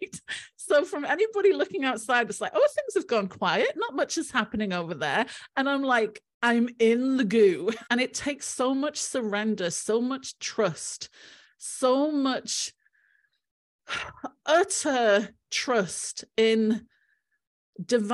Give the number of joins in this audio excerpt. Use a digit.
1